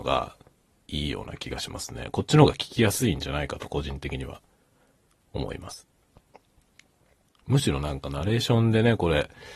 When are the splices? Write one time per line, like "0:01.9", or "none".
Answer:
0:07.3